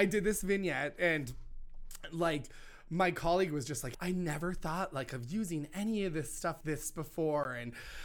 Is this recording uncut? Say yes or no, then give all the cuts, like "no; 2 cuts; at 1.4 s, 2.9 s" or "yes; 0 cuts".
no; 2 cuts; at 3.9 s, 6.6 s